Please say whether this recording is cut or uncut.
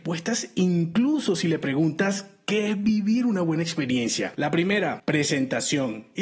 cut